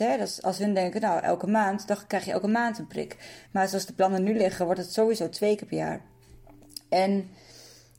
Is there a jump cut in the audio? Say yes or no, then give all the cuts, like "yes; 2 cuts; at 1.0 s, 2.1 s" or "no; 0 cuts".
yes; 1 cut; at 3.5 s